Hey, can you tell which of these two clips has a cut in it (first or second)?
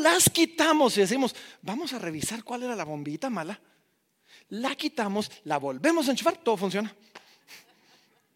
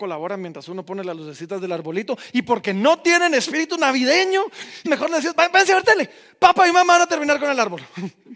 second